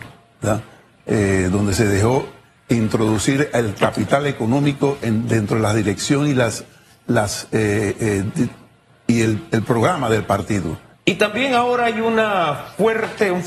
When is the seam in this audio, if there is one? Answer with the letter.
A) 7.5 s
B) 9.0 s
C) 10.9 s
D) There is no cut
C